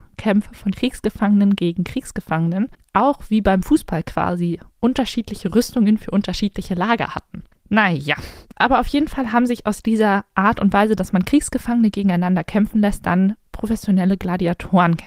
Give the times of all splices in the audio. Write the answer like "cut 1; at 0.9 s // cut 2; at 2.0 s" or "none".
cut 1; at 7.5 s